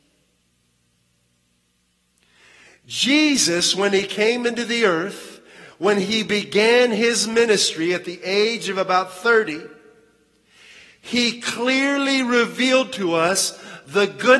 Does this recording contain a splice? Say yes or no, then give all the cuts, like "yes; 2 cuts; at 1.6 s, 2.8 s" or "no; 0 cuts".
no; 0 cuts